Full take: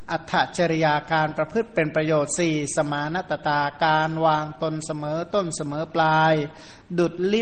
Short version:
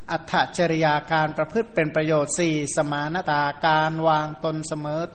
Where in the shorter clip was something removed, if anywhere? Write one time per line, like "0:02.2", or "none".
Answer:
0:03.2

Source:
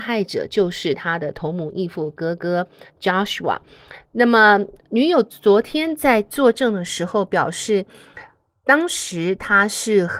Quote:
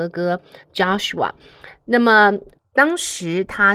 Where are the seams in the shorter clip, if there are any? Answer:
0:02.6

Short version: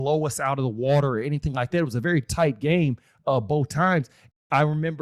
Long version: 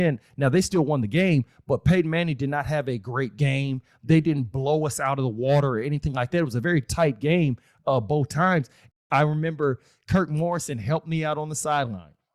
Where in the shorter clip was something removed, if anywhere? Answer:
none

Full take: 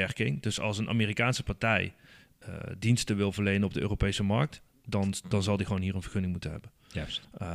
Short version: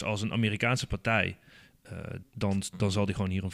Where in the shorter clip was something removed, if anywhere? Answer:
0:02.2

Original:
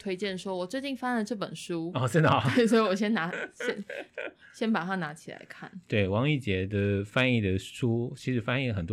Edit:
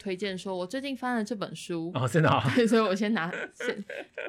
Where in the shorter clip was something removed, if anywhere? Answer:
none

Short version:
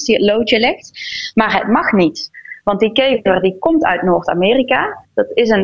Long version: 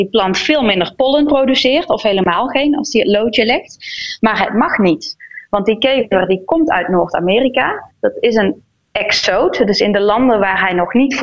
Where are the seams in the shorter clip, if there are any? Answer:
none

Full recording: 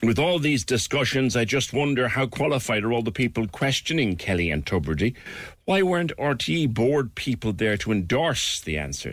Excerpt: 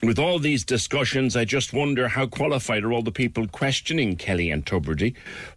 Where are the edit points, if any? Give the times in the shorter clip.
none

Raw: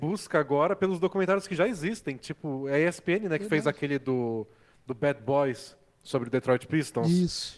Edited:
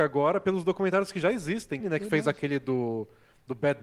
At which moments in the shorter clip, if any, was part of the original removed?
0:01.8

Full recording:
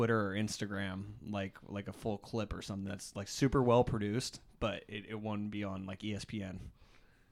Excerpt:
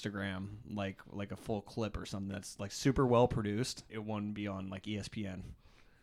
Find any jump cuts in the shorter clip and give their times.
0:03.9

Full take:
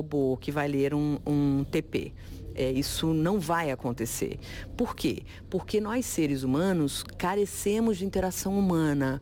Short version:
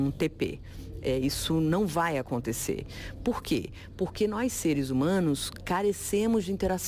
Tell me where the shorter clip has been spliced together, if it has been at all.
none

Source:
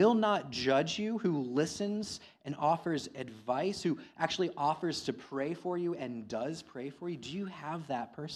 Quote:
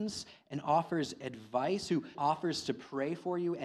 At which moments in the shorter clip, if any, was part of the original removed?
0:02.1

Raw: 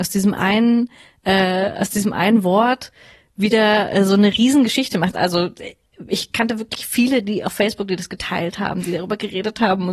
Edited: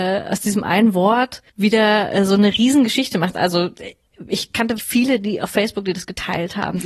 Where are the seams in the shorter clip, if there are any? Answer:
0:01.5
0:04.8

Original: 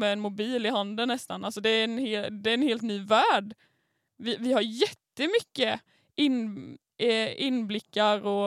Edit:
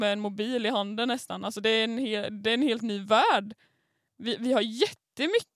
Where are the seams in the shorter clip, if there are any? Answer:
none

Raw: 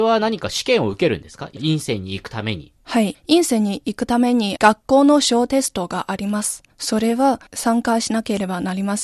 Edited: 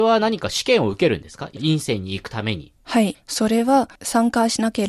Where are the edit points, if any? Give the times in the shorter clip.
0:03.2

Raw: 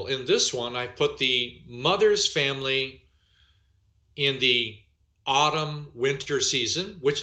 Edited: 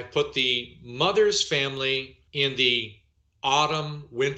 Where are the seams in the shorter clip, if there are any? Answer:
0:02.3

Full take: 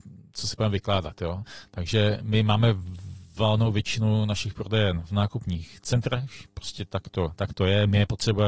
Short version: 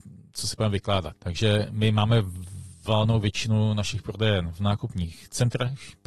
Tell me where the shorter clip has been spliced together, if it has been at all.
0:01.2

